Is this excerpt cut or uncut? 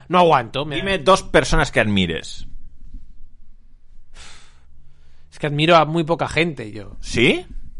uncut